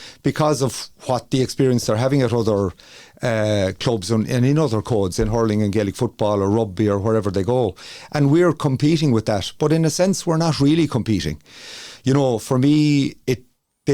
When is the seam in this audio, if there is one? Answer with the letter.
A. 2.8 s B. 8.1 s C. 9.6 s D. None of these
D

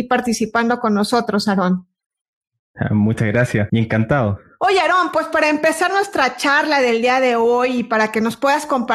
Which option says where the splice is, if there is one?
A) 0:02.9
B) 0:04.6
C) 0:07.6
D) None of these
B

